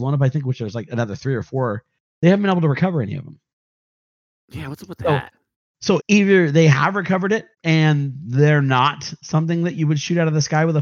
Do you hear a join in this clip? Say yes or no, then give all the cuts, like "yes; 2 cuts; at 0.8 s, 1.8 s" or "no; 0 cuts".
yes; 2 cuts; at 6.0 s, 7.5 s